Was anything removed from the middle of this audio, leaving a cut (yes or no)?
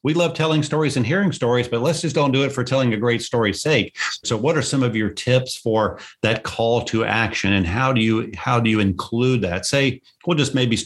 yes